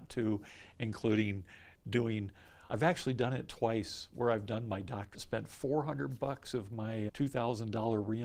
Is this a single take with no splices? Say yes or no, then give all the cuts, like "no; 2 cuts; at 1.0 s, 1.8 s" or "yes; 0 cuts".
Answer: no; 3 cuts; at 2.7 s, 5.1 s, 7.1 s